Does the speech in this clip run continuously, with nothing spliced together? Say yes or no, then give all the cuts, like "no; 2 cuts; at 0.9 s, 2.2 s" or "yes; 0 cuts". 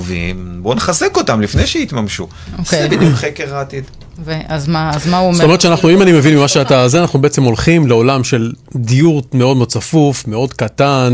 no; 1 cut; at 8.6 s